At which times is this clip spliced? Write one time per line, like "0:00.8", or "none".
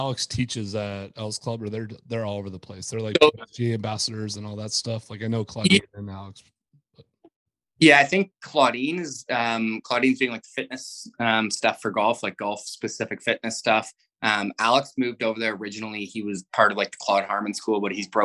none